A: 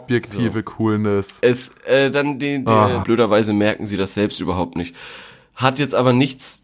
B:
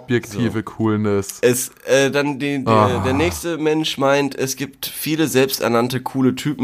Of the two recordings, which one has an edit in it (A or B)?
A